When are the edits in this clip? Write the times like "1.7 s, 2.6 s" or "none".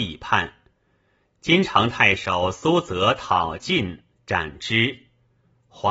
none